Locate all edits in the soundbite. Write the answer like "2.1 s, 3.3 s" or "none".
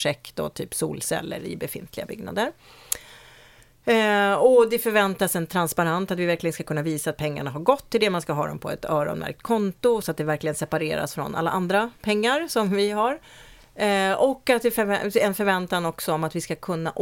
10.0 s